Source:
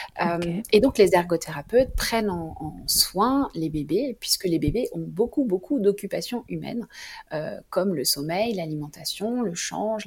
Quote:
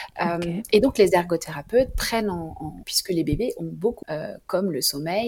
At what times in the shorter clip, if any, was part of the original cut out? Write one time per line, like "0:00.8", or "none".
0:02.8
0:04.0